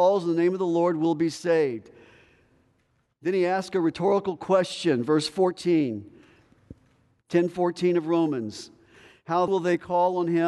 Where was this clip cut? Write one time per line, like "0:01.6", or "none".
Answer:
0:09.5